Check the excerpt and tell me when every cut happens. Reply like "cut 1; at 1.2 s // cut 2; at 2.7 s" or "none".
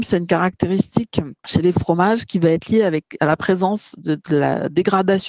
cut 1; at 1.4 s